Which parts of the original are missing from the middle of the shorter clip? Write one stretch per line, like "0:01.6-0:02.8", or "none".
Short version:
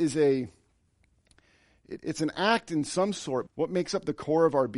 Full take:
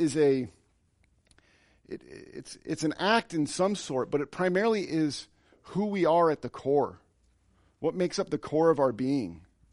0:02.0-0:02.6
0:04.1-0:07.7